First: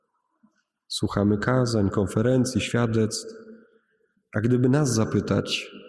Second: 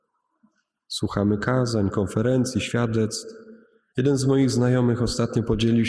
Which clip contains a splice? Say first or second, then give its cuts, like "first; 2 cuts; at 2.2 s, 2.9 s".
second; 1 cut; at 3.9 s